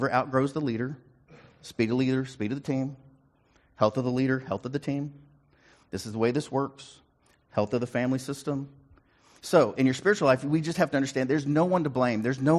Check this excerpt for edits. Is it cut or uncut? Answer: uncut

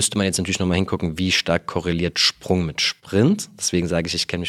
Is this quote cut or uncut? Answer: uncut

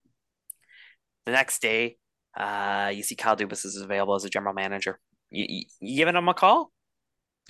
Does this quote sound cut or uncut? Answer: uncut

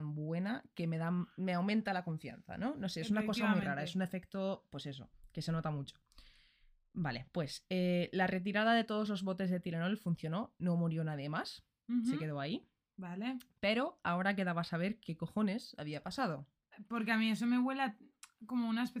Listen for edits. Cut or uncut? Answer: uncut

